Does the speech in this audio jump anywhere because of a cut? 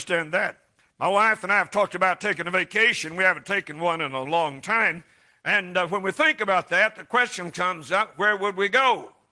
yes; 1 cut; at 4.2 s

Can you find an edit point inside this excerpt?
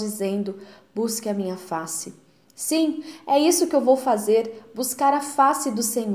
no; 0 cuts

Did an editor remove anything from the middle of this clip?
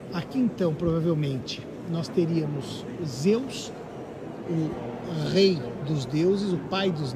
no; 0 cuts

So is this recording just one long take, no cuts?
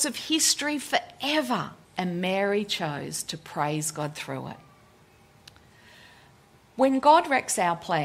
no; 1 cut; at 1.8 s

